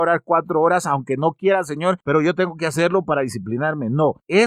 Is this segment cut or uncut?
uncut